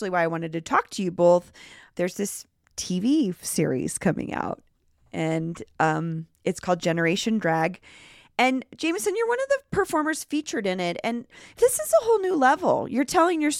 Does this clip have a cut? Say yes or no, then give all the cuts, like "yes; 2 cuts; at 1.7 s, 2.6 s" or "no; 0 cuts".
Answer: no; 0 cuts